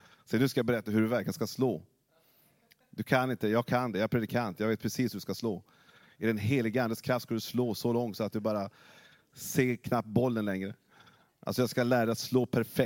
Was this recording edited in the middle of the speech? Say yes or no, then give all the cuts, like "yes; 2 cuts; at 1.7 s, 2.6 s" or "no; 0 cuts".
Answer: no; 0 cuts